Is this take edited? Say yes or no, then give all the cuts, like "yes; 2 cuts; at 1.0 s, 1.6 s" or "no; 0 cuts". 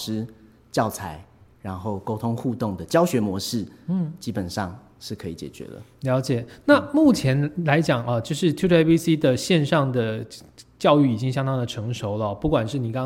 no; 0 cuts